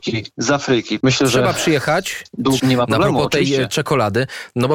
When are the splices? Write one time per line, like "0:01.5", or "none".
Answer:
0:01.0
0:02.6